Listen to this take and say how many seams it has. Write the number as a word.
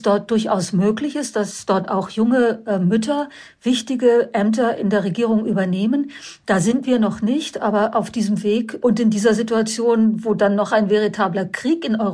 one